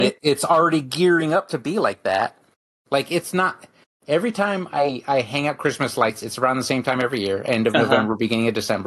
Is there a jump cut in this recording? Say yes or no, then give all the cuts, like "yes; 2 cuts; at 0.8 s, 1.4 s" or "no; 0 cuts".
no; 0 cuts